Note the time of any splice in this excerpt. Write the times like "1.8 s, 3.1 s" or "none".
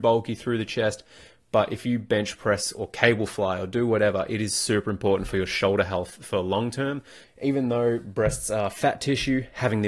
7.2 s